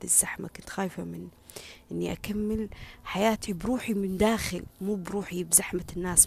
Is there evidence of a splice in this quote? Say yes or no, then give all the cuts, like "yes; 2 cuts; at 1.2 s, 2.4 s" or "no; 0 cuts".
yes; 1 cut; at 3.5 s